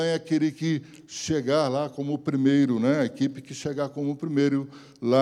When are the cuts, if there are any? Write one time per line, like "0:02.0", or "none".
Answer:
none

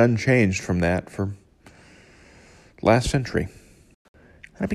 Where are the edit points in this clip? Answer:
none

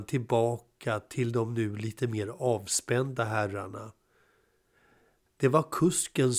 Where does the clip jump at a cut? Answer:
0:05.3

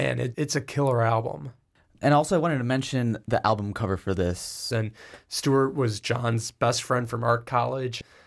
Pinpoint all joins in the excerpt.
0:04.7

